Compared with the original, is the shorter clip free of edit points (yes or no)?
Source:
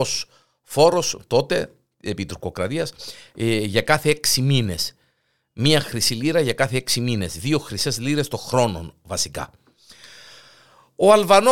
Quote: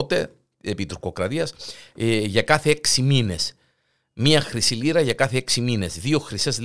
yes